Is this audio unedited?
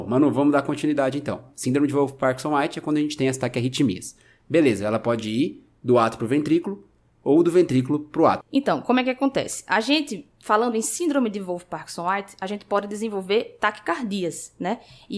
no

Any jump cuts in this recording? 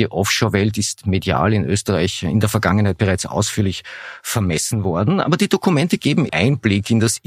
yes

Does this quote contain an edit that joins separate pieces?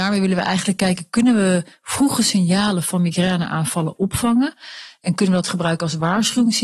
no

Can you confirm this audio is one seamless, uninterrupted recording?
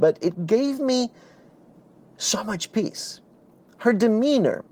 yes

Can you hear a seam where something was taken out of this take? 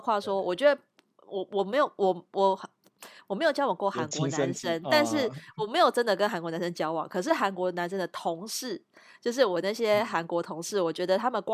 no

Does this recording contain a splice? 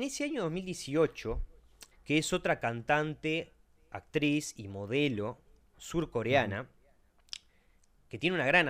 yes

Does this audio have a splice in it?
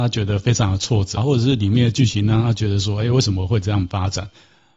yes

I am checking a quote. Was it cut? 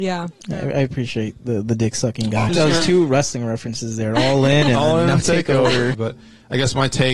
yes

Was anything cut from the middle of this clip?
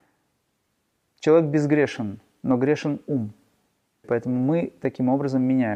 yes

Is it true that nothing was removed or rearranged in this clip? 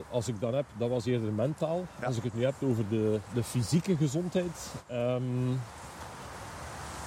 yes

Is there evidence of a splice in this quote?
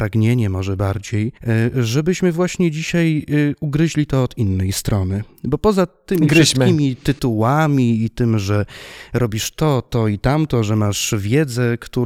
yes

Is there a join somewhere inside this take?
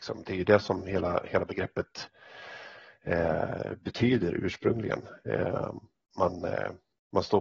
yes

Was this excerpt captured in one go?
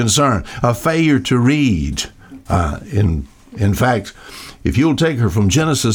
yes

